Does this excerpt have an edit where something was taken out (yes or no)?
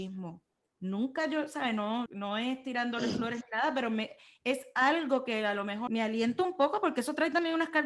yes